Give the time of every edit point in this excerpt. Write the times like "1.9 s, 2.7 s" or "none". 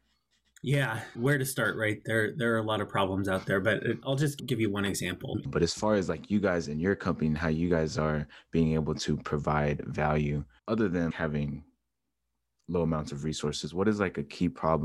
5.4 s, 10.6 s